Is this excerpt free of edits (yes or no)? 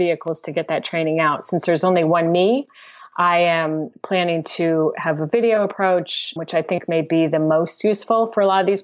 no